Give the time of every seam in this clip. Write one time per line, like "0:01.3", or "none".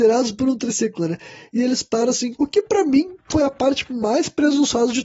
0:02.3

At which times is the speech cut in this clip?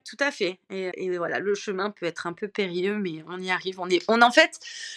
0:00.9

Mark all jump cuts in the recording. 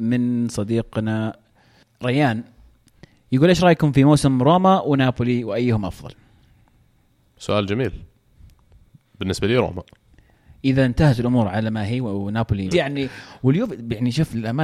0:12.7

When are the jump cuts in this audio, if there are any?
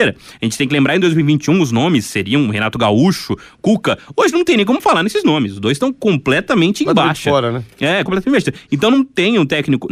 0:08.1

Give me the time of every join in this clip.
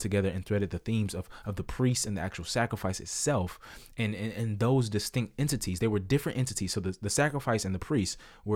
none

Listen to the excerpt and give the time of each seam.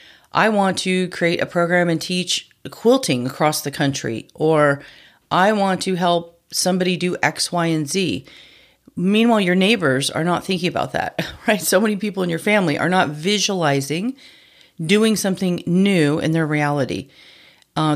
none

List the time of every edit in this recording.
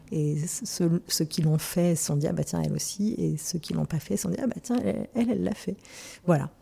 none

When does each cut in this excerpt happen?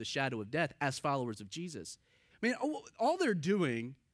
0:02.3

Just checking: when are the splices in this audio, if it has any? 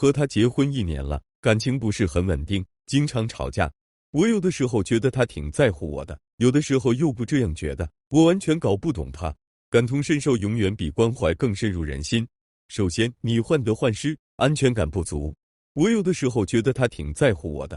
0:09.5

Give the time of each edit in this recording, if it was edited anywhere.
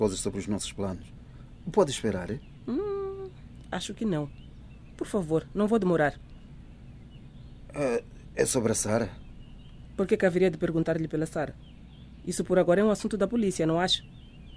none

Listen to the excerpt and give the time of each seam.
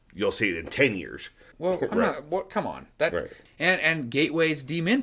0:01.5
0:03.5

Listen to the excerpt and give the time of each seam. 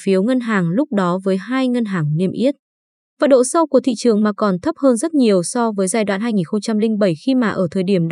0:03.0

